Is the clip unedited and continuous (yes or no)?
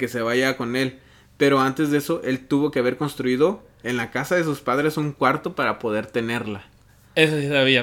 yes